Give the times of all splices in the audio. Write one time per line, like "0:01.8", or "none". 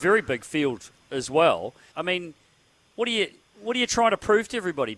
0:01.9